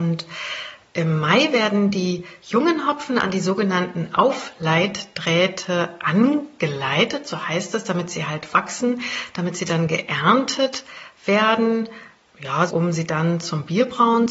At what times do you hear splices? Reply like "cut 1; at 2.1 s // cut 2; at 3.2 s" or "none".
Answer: cut 1; at 12.7 s

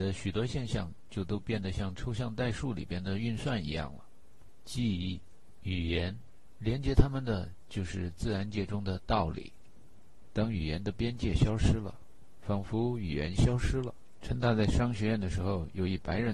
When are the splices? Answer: cut 1; at 14.2 s

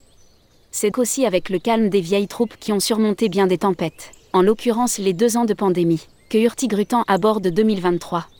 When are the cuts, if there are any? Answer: cut 1; at 0.9 s

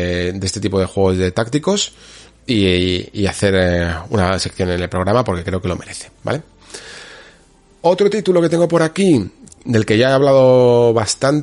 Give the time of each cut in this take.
none

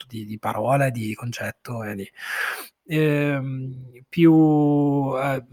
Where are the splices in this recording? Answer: cut 1; at 2.7 s

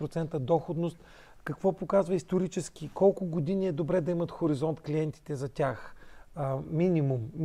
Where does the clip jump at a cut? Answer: none

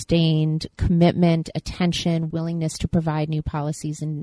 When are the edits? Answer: cut 1; at 2.3 s

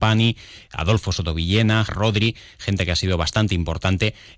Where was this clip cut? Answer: cut 1; at 1.9 s

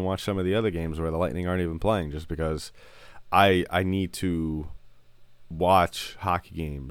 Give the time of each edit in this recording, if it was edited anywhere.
none

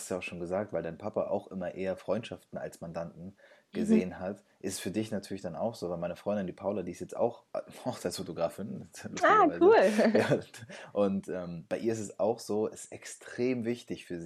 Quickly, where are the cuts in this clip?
none

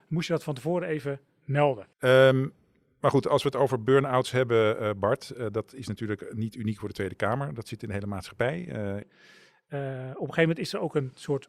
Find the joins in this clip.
cut 1; at 1.9 s // cut 2; at 9.0 s

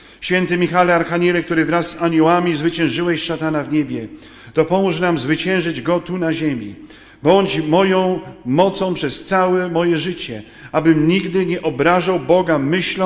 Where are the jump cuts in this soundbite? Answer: none

